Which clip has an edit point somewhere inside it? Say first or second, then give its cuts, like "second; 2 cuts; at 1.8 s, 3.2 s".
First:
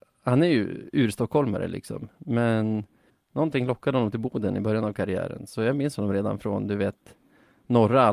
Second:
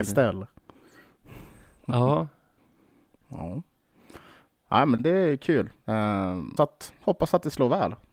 second; 2 cuts; at 5.0 s, 6.6 s